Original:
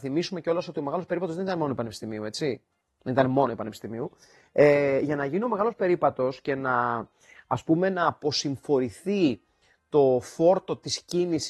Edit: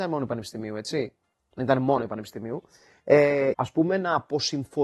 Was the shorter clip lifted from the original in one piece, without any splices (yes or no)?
no